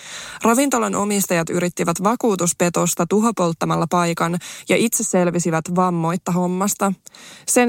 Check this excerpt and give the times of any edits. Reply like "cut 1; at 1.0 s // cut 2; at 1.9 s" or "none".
none